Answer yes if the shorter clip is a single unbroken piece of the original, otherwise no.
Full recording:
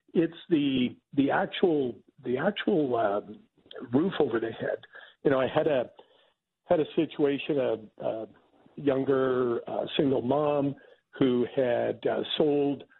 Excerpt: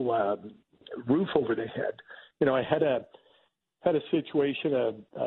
yes